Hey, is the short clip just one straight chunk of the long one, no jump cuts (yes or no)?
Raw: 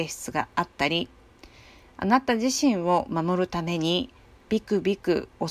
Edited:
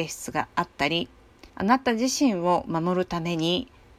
no